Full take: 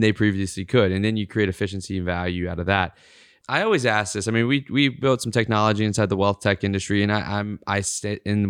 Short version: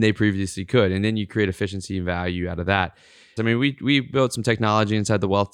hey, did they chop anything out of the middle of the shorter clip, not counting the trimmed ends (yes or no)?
yes